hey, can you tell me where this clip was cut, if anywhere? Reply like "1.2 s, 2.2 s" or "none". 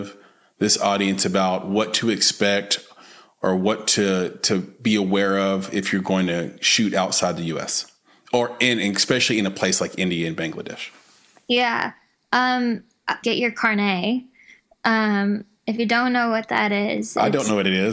13.2 s